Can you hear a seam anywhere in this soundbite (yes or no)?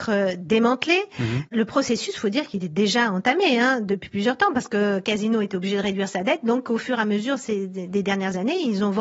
no